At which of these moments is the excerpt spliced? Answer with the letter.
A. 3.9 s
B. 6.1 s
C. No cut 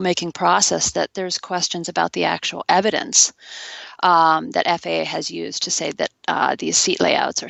C